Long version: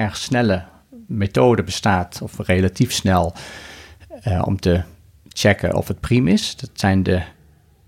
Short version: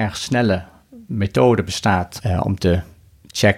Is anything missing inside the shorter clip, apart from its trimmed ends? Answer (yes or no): yes